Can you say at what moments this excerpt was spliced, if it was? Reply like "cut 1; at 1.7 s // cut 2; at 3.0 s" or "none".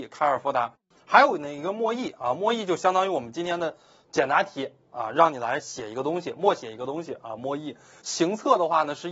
cut 1; at 8.0 s